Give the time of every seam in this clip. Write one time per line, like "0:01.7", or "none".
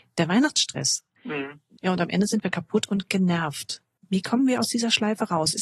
0:01.8
0:04.0